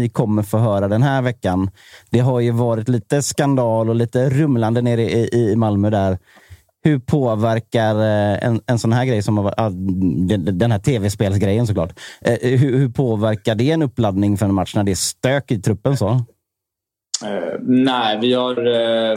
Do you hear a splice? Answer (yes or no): no